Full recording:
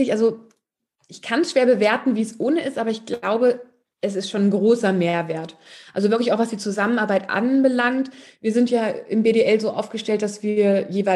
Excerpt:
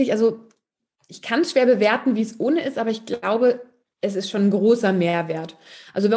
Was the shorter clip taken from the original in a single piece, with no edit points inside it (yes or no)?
yes